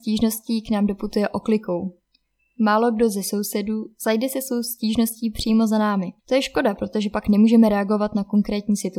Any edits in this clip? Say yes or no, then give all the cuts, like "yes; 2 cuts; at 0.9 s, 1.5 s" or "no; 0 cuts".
yes; 1 cut; at 6.2 s